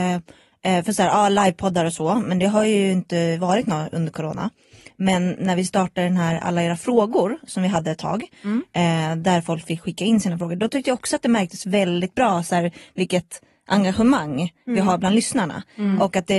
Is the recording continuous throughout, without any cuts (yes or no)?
yes